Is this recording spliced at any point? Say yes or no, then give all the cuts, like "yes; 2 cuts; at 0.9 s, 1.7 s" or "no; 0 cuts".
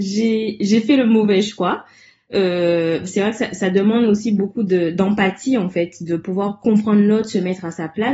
no; 0 cuts